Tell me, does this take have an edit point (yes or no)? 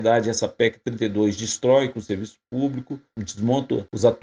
yes